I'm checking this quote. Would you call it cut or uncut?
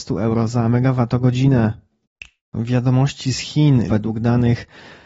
cut